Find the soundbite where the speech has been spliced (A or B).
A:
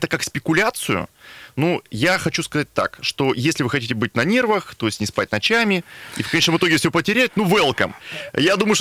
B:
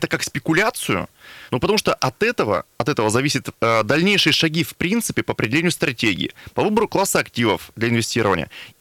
B